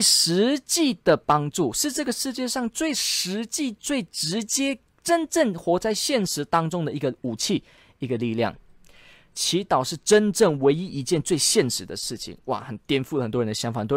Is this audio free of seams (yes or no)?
yes